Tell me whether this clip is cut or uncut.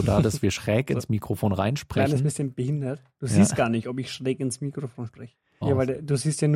cut